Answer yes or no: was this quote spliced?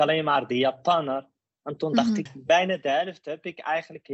yes